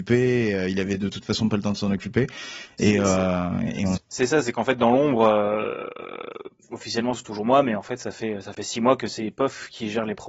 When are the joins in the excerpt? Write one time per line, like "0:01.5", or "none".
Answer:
0:04.0